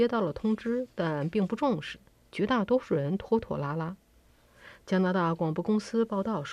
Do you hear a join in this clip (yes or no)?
no